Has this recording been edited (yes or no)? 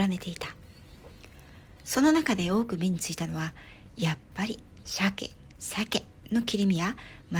yes